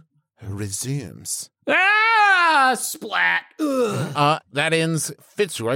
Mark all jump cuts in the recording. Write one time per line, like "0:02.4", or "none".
0:01.6
0:04.5